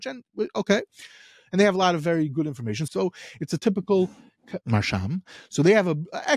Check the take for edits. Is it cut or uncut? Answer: cut